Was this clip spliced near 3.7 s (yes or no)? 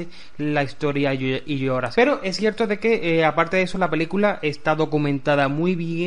no